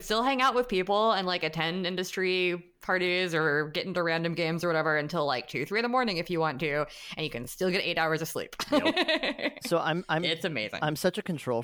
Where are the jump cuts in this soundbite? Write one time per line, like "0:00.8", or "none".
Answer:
none